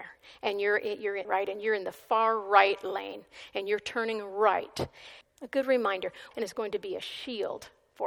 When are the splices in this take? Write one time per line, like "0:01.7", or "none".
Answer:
0:01.2
0:05.2
0:06.3